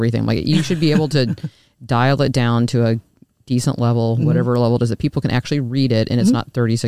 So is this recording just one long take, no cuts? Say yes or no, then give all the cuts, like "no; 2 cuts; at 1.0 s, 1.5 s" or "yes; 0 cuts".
yes; 0 cuts